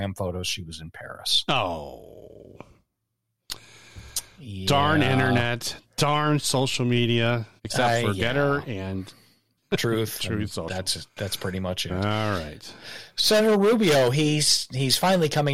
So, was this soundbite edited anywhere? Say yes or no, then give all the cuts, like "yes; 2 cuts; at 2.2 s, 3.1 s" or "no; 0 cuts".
yes; 1 cut; at 7.6 s